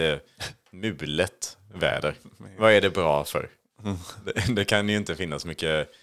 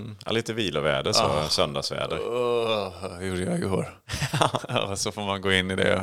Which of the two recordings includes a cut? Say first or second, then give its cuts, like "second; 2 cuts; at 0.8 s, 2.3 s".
second; 1 cut; at 4.0 s